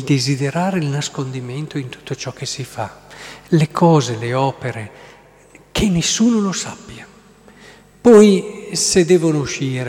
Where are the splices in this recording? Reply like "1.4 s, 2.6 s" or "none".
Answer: none